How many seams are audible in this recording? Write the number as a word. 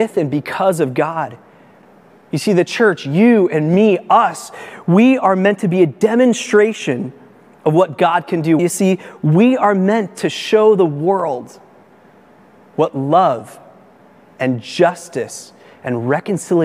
one